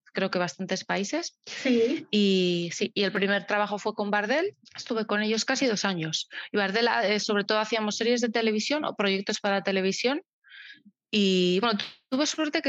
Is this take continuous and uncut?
no; 1 cut; at 4.7 s

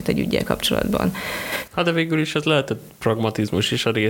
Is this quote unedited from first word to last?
no; 1 cut; at 1.7 s

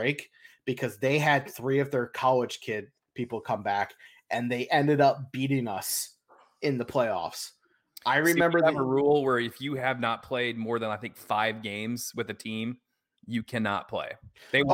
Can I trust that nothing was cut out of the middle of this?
yes; 0 cuts

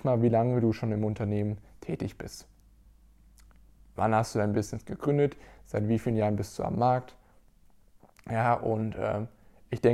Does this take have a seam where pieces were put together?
no; 0 cuts

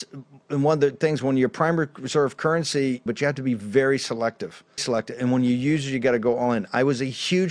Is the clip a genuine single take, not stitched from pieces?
no; 2 cuts; at 3.1 s, 4.8 s

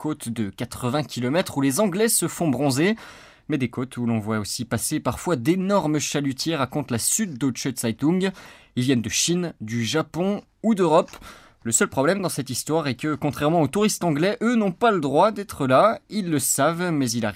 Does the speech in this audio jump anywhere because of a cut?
no; 0 cuts

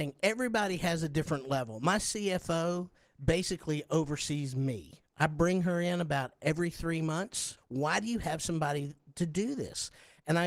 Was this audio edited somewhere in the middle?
yes; 1 cut; at 7.6 s

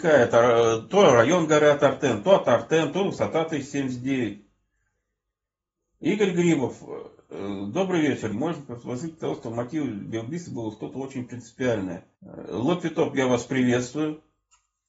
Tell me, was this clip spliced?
yes; 2 cuts; at 8.3 s, 12.1 s

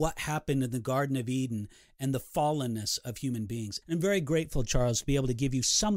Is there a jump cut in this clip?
yes; 1 cut; at 3.8 s

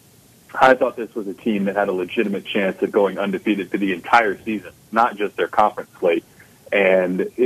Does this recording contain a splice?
no; 0 cuts

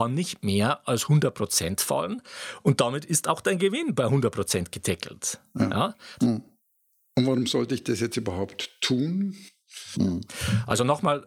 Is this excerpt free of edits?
no; 2 cuts; at 6.2 s, 9.9 s

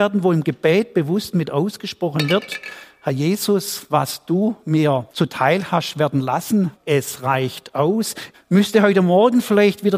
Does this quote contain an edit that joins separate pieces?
yes; 3 cuts; at 5.1 s, 6.7 s, 8.3 s

